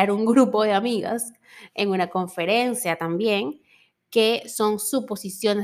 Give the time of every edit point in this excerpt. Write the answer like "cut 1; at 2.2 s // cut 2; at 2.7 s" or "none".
none